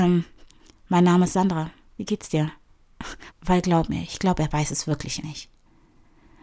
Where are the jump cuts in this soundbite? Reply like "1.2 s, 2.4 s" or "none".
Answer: 3.3 s, 5.2 s